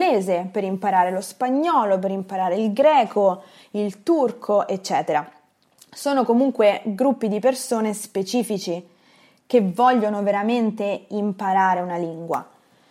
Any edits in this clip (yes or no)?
no